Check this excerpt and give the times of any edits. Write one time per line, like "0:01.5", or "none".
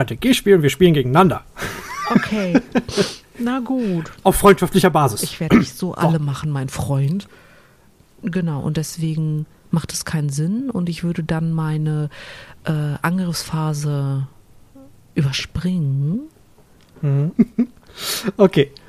0:08.2
0:17.4